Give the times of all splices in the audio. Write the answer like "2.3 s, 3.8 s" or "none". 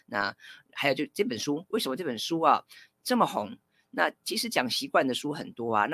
1.7 s